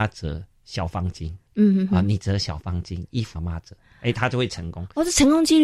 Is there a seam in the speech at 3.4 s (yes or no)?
yes